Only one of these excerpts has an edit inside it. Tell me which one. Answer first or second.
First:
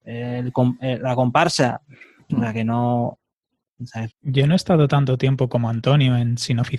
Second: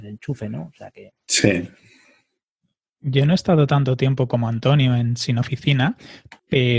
first